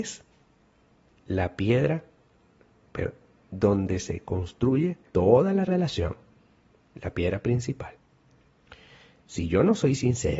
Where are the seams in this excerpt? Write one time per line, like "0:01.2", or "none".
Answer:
0:05.1